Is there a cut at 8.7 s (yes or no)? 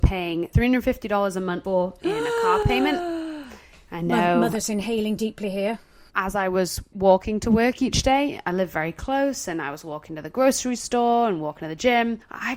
no